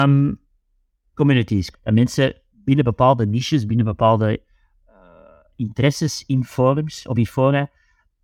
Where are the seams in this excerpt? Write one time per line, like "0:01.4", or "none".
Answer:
0:01.7